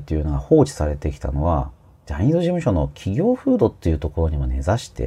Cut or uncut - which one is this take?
uncut